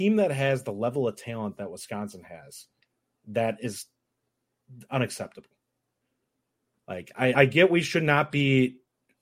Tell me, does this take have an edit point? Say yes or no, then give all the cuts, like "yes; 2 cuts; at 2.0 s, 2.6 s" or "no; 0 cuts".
yes; 1 cut; at 7.3 s